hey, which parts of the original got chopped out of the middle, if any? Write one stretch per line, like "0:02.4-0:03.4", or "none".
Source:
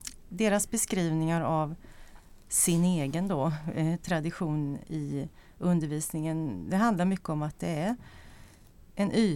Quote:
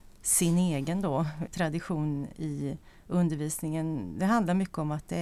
0:03.7-0:04.0